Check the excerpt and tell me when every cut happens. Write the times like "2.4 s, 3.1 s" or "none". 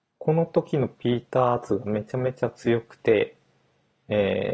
none